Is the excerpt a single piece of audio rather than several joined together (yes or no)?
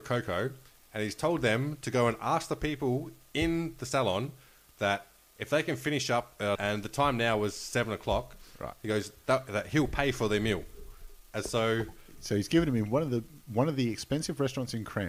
no